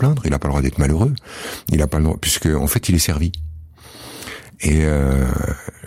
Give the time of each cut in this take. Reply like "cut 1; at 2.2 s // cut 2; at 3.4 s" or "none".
none